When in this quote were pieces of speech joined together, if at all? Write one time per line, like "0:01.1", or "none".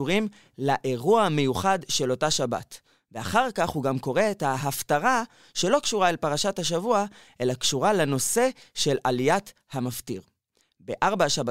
none